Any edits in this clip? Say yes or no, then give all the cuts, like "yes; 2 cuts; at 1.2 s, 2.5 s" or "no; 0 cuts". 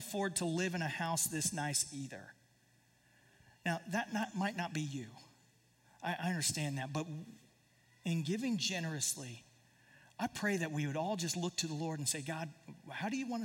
no; 0 cuts